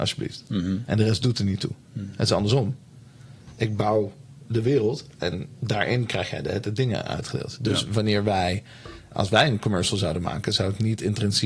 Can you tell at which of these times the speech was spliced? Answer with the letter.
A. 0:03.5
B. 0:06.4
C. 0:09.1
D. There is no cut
C